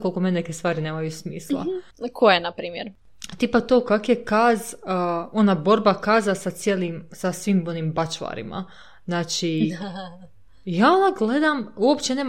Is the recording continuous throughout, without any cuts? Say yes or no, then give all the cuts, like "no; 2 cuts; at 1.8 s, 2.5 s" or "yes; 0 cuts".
yes; 0 cuts